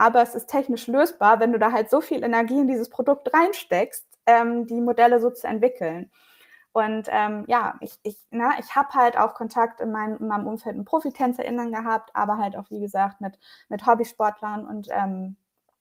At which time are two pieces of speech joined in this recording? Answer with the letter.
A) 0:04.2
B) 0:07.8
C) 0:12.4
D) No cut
B